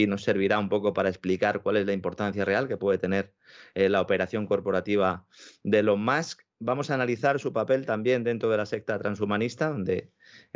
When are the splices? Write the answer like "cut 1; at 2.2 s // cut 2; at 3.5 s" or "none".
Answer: none